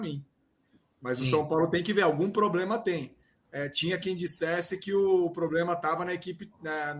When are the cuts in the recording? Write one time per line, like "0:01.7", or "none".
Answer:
none

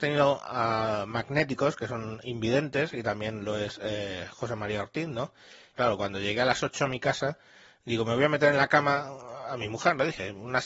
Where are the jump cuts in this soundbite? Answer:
0:05.7

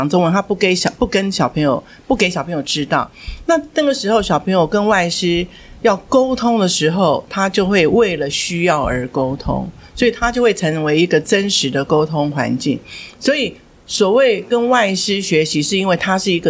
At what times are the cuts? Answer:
none

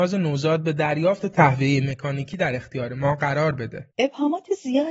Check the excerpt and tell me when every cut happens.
0:03.9

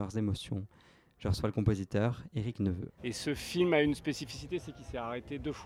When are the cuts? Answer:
0:03.0

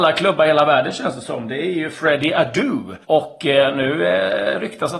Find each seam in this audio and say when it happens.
0:03.0

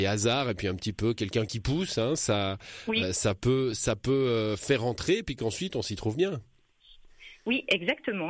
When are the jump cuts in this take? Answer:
none

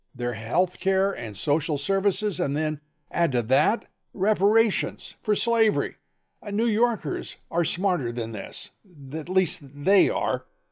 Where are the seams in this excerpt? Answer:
none

